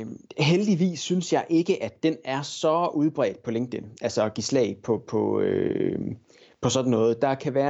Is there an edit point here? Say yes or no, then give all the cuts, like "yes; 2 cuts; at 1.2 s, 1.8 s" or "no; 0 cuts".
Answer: no; 0 cuts